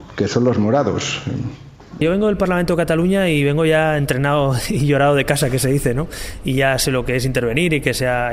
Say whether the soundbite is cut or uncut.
cut